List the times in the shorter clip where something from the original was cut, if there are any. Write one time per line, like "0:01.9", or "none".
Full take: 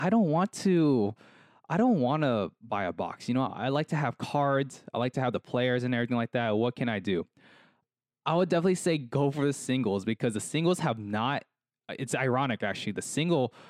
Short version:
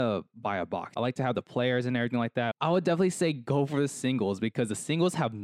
0:00.9
0:02.5